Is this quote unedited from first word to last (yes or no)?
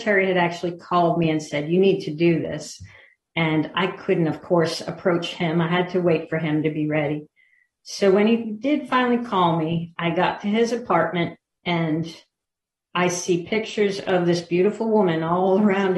yes